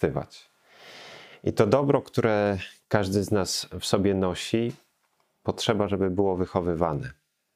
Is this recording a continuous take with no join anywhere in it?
yes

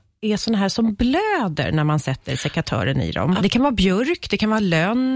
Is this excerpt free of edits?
no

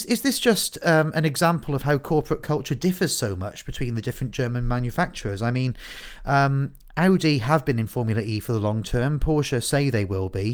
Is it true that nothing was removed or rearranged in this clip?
yes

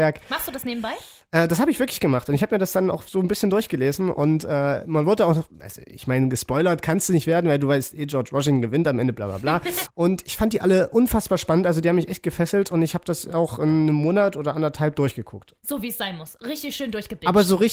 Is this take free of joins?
no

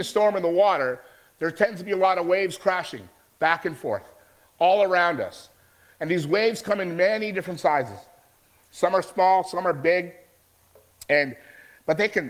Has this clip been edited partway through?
no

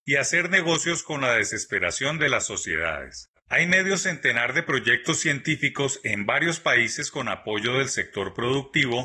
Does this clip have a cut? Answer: yes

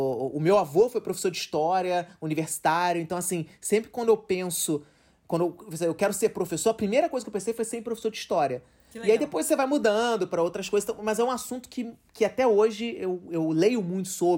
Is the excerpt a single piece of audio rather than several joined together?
yes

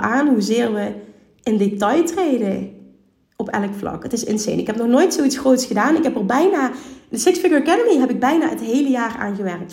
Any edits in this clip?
no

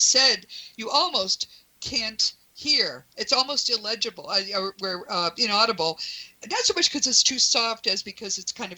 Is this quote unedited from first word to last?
yes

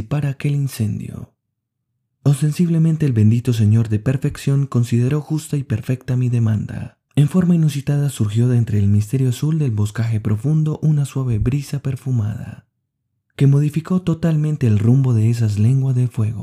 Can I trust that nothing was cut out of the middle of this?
no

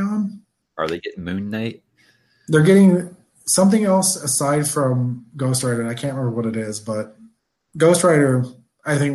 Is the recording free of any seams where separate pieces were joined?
yes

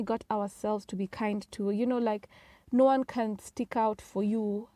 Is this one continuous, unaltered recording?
yes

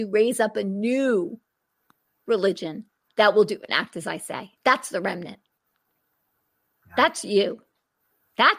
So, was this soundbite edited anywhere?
yes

